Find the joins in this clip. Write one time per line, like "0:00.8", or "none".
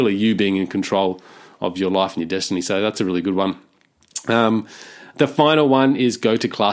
none